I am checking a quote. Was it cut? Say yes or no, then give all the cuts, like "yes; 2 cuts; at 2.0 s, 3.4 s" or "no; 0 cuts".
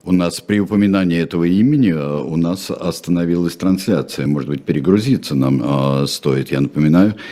no; 0 cuts